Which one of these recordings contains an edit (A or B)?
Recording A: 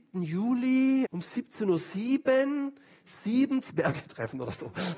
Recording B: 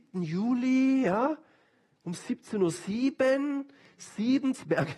A